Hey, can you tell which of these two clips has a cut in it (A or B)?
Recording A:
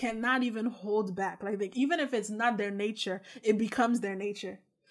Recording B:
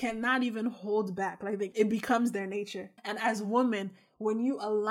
B